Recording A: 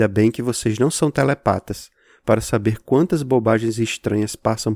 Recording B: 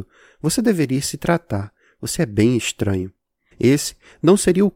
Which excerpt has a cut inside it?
B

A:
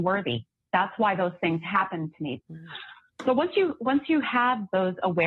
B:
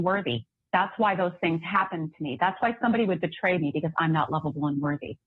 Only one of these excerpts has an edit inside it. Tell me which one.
A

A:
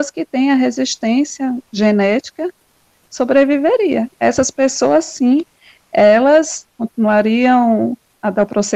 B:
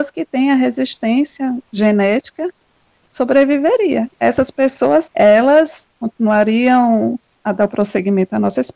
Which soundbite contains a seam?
B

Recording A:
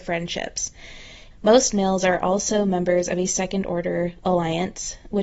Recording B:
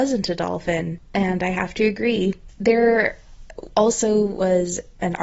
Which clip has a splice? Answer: A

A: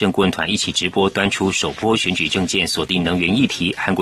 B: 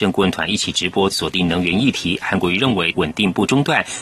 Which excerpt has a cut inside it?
B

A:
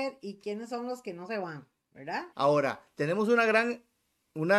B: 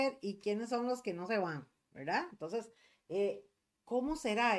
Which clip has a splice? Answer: A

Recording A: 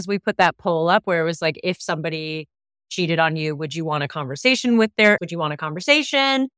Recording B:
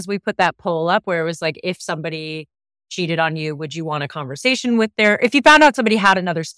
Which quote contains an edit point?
A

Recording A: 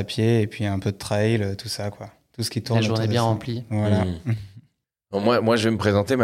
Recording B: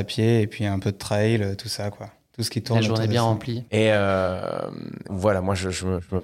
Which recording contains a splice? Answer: B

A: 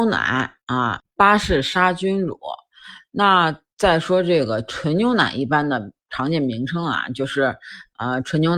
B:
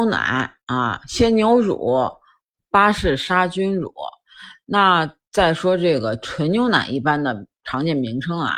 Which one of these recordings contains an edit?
A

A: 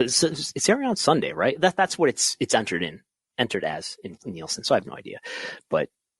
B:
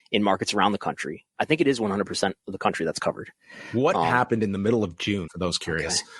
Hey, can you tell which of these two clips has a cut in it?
B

